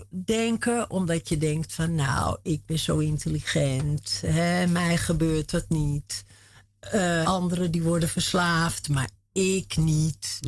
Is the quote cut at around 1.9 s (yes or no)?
no